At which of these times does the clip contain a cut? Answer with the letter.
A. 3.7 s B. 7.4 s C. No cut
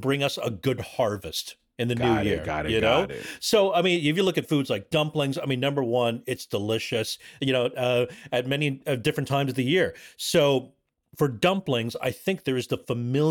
B